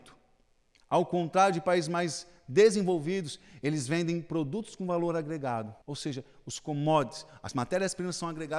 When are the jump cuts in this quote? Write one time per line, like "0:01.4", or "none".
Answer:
0:05.8

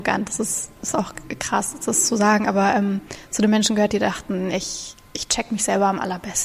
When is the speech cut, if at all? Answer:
none

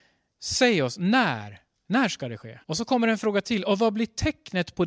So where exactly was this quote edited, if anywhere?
0:02.6

